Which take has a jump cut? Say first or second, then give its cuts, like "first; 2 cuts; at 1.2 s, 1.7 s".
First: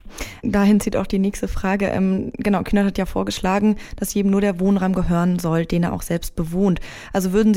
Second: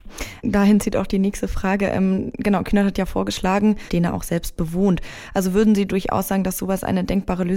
second; 1 cut; at 3.9 s